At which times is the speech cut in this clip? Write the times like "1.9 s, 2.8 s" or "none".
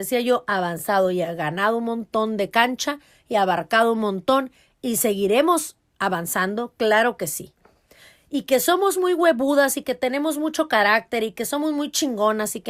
none